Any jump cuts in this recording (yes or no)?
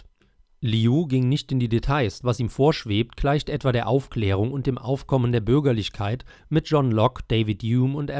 yes